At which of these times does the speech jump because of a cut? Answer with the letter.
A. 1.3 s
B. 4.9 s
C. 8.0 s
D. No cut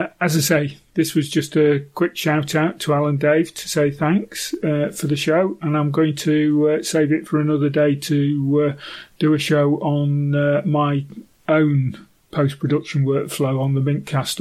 D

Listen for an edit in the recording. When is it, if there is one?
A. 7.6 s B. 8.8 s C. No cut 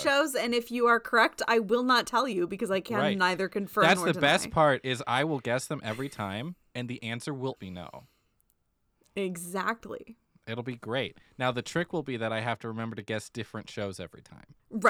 A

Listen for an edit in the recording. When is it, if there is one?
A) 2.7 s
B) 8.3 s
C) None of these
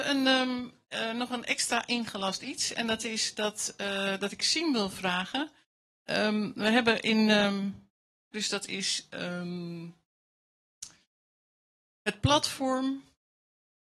B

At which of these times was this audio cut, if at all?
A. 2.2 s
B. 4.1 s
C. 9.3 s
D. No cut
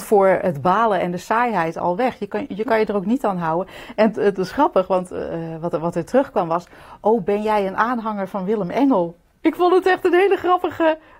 D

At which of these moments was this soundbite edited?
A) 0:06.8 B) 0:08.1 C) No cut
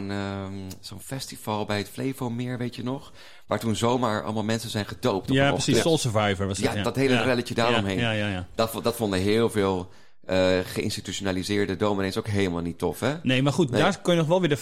A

